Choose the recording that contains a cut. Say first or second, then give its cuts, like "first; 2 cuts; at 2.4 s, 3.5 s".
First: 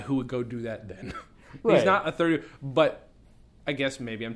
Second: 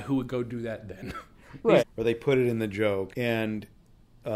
second; 2 cuts; at 1.8 s, 3.1 s